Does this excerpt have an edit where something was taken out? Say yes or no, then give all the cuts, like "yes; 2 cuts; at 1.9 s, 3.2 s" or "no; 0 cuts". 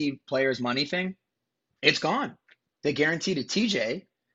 no; 0 cuts